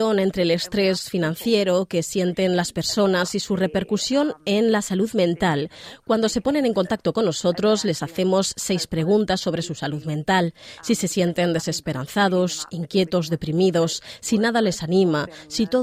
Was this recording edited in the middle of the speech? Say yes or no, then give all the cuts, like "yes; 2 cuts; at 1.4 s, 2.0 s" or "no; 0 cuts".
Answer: no; 0 cuts